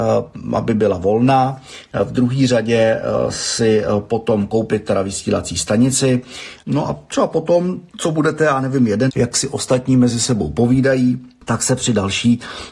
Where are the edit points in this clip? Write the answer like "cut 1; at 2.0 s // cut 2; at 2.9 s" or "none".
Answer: cut 1; at 6.6 s // cut 2; at 9.1 s